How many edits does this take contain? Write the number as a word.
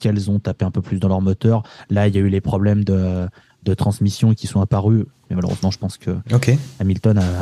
one